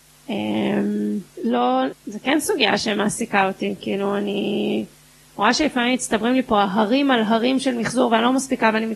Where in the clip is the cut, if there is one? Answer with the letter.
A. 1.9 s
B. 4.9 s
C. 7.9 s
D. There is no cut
A